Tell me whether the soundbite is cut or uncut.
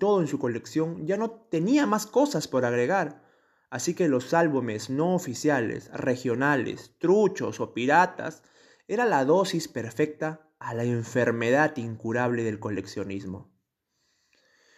uncut